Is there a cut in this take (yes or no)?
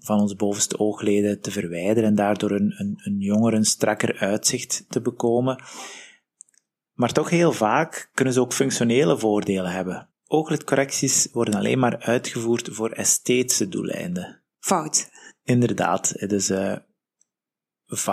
yes